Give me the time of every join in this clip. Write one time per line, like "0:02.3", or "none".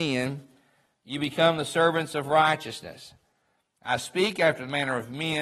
none